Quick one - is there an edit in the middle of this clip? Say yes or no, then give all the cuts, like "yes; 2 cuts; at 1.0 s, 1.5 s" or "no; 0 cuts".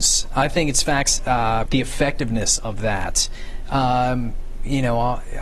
yes; 1 cut; at 1.7 s